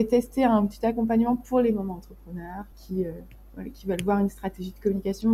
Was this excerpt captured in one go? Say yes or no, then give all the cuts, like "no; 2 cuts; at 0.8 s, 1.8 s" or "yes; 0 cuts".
no; 1 cut; at 2.7 s